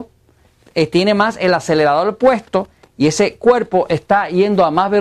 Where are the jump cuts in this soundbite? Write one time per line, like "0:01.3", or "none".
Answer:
none